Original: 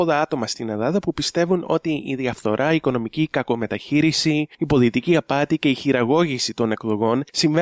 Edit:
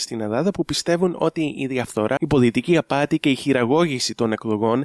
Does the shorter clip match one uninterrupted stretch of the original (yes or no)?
no